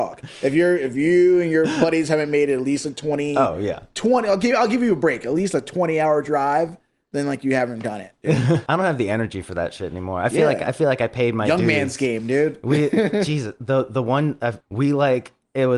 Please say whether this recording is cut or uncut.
cut